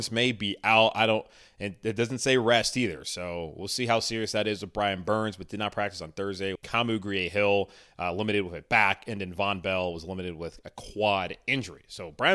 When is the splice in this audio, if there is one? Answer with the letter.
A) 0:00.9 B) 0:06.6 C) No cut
B